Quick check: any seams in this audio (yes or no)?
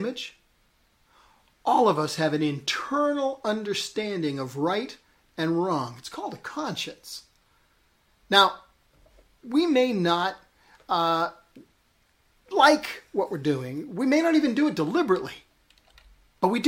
yes